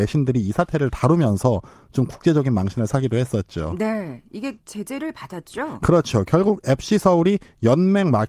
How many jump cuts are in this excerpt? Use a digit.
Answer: 1